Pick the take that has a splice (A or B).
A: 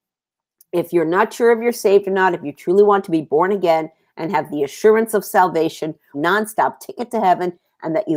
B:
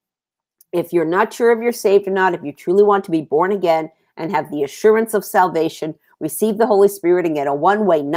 A